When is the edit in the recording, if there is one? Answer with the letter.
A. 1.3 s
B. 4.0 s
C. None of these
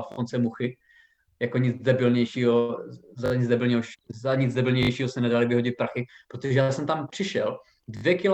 C